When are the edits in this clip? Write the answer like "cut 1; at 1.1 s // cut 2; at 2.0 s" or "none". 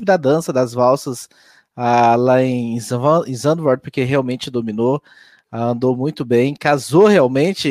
none